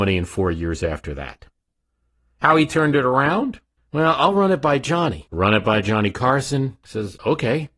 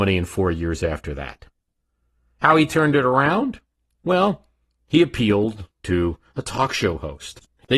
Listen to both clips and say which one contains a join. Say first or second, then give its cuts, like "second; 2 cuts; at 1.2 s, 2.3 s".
first; 1 cut; at 3.8 s